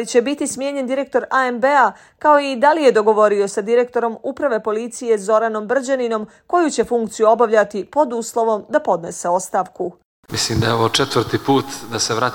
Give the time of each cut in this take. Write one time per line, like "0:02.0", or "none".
0:10.3